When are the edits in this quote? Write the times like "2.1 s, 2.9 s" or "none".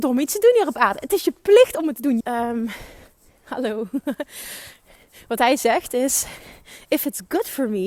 2.2 s